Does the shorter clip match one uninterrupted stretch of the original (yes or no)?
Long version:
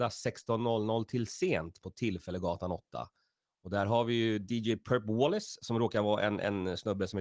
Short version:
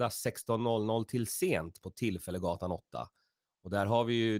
yes